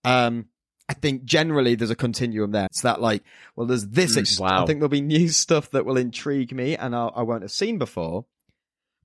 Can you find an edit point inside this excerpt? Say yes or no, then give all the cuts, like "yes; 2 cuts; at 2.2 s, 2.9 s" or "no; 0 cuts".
yes; 2 cuts; at 2.7 s, 4.2 s